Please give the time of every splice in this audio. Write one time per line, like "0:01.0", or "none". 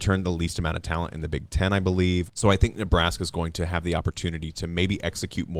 none